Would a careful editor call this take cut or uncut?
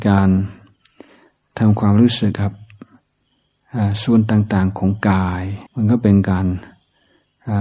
cut